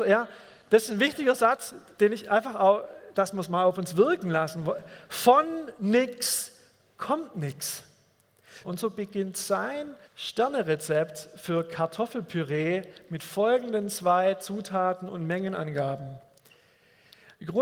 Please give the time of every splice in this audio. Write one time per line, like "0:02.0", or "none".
0:08.6
0:10.0